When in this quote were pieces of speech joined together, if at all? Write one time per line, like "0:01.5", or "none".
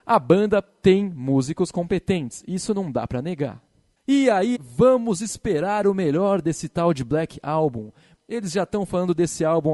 0:04.5